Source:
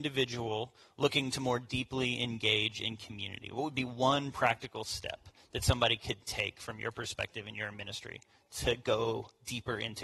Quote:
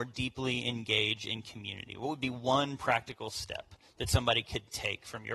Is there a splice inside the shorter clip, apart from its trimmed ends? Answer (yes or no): no